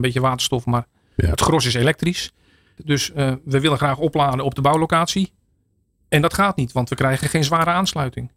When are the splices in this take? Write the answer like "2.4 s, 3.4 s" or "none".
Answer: 2.8 s